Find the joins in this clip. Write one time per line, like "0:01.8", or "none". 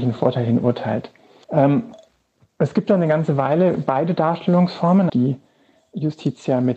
0:01.4
0:05.1